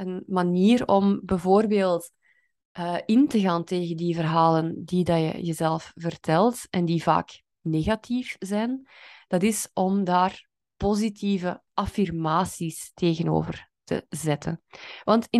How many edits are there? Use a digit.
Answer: 0